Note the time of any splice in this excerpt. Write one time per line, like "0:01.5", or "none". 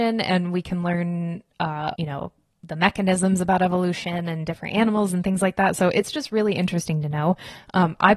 0:01.9